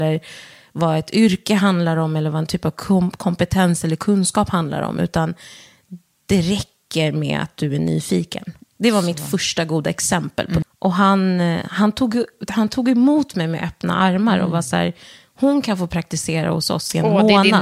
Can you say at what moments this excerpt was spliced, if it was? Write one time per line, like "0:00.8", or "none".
0:08.6
0:10.6